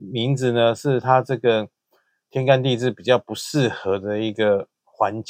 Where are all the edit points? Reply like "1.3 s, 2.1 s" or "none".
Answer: none